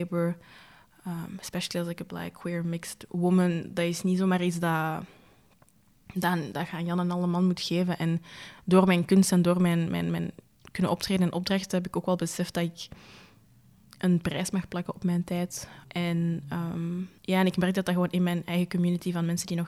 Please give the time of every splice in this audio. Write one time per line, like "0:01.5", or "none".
0:15.8
0:17.2